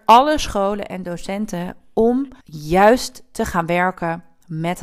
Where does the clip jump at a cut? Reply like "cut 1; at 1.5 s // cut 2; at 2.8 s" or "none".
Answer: cut 1; at 2.4 s